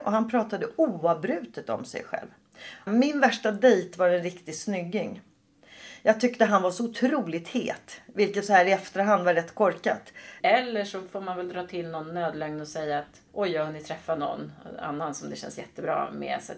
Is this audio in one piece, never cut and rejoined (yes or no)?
no